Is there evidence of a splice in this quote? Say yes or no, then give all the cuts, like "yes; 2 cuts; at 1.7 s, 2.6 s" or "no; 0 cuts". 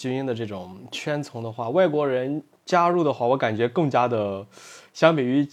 no; 0 cuts